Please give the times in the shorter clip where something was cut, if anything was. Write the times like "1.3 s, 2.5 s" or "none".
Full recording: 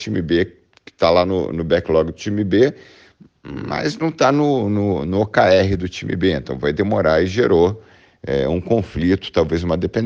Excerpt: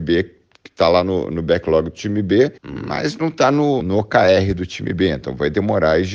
2.6 s, 3.8 s